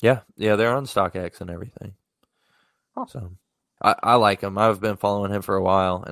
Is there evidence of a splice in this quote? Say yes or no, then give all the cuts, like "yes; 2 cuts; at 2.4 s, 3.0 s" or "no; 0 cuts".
yes; 1 cut; at 3.8 s